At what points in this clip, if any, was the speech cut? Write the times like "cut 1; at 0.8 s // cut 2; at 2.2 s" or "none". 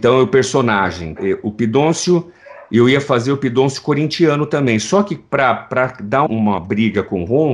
cut 1; at 1.2 s // cut 2; at 6.3 s